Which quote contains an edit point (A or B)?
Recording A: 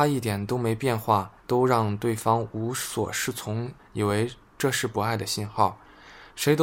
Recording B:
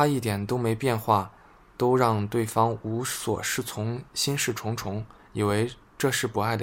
A